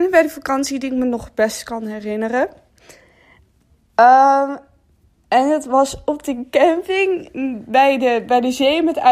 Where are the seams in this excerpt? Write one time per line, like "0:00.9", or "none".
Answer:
none

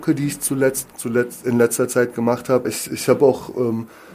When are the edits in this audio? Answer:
0:00.9
0:02.6

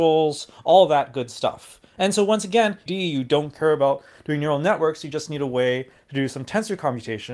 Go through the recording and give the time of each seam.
0:02.9

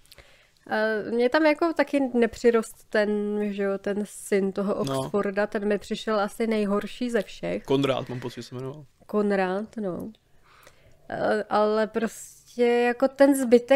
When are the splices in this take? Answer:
none

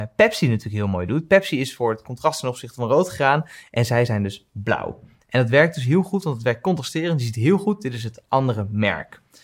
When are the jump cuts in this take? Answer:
none

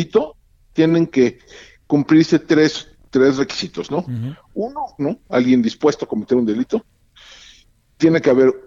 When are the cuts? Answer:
0:05.0

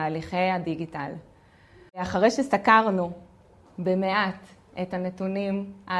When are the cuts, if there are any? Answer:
0:01.9

